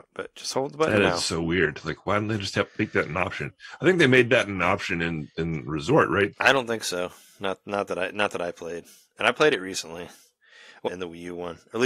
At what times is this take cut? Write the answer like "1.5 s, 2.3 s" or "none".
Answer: 6.3 s, 10.9 s

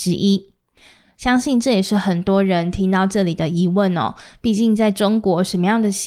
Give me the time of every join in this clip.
none

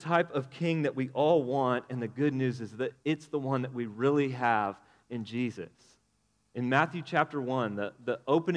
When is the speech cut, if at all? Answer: none

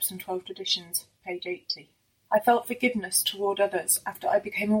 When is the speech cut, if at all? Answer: 2.3 s

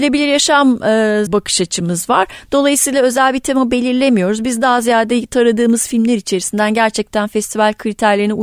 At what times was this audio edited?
1.3 s

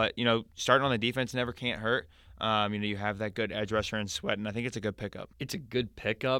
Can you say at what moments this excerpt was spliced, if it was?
5.3 s

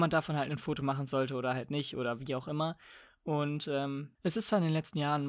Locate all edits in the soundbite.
none

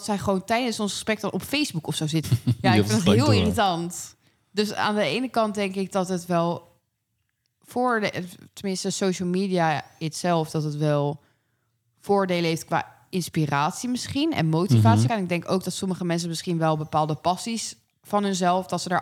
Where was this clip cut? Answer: 2.2 s, 15.1 s

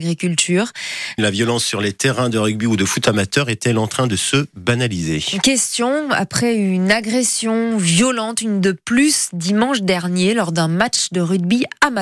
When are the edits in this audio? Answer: 1.2 s

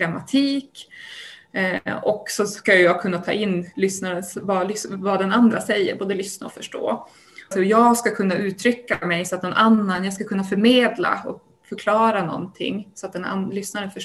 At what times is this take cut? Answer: 7.5 s

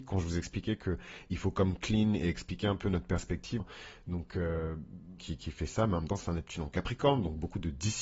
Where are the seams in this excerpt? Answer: 3.6 s, 5.2 s

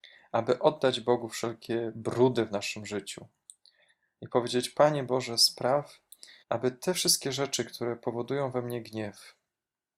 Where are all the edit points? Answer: 6.4 s

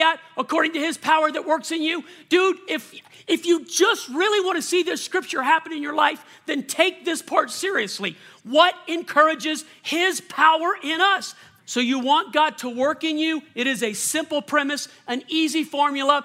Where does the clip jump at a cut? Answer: 11.6 s

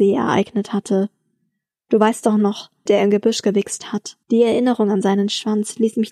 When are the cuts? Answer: 2.9 s, 4.2 s

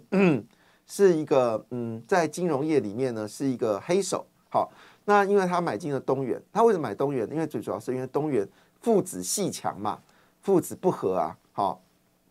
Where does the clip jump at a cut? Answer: none

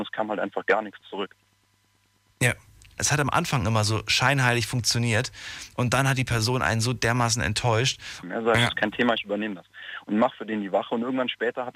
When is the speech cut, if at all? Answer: 3.0 s, 8.2 s

